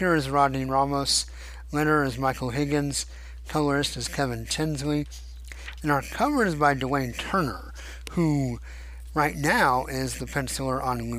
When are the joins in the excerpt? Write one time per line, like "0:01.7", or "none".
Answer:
none